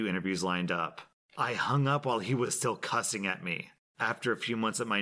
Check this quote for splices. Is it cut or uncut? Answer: uncut